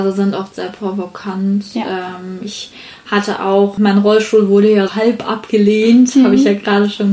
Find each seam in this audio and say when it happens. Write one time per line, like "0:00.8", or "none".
0:03.8
0:04.9

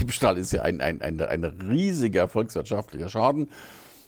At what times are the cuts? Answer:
0:01.0

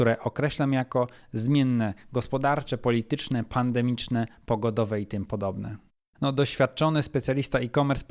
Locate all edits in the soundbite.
0:06.1

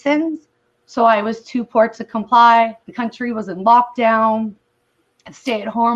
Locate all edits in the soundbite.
0:02.8

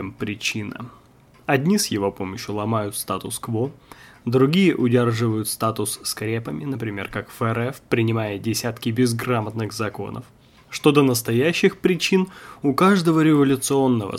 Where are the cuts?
none

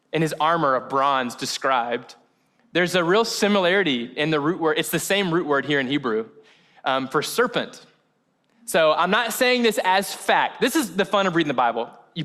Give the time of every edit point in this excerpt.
none

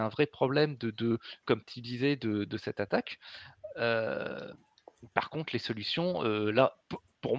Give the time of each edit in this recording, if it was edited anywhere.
0:01.4

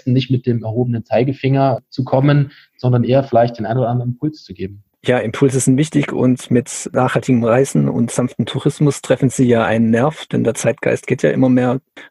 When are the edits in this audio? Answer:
none

